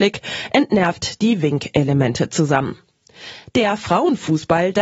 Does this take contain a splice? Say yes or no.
no